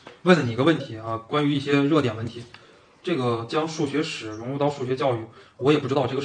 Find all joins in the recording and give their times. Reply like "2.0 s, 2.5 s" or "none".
none